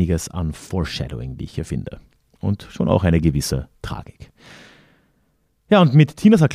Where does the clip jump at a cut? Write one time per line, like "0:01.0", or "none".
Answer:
none